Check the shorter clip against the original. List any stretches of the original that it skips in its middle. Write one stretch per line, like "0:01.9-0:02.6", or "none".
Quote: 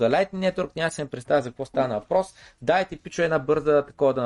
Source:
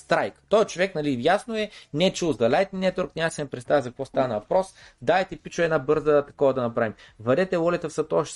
none